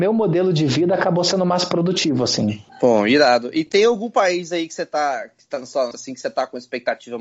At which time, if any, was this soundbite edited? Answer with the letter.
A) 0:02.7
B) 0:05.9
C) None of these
B